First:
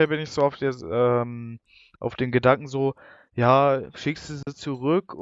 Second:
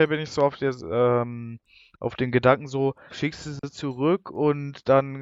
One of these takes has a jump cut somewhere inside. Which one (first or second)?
second